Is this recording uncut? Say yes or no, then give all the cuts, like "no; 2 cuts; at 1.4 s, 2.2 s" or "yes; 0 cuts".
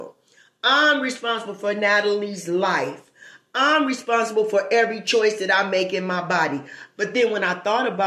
no; 1 cut; at 7.0 s